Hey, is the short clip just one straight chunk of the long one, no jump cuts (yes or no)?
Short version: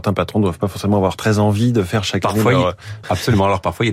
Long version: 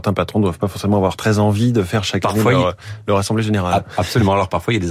no